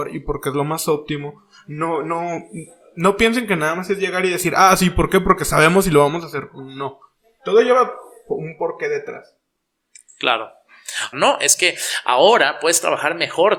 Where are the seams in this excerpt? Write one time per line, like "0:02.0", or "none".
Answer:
0:11.1